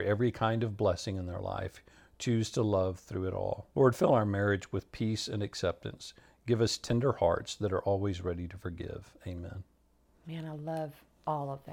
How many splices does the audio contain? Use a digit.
1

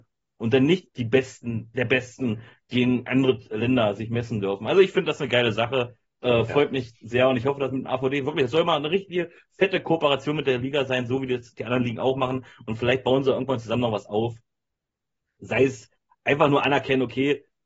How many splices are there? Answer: 0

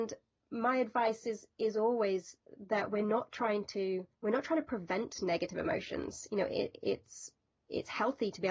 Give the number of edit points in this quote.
1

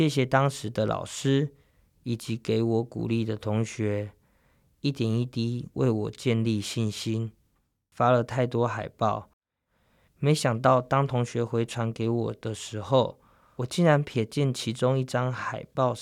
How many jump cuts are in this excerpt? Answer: 1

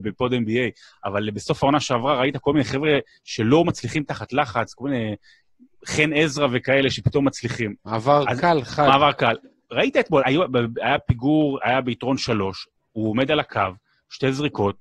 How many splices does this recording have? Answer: 2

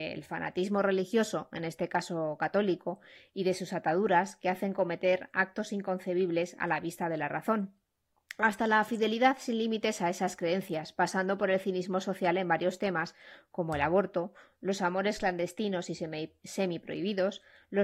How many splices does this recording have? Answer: 0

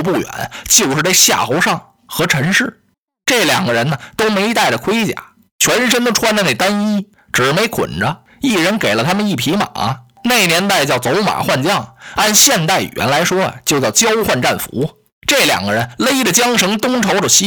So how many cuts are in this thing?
0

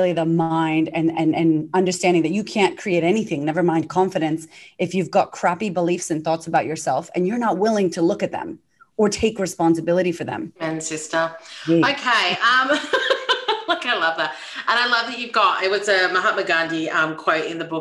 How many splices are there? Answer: 1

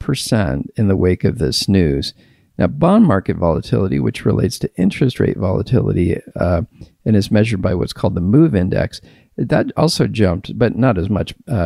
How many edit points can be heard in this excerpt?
0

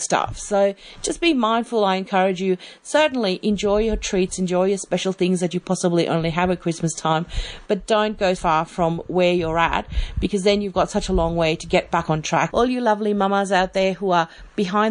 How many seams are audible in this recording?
2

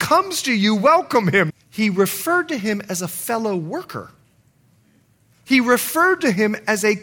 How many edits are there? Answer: 1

